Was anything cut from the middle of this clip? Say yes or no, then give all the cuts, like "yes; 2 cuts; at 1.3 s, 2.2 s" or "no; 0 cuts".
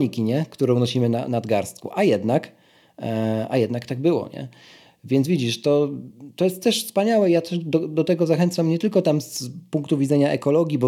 no; 0 cuts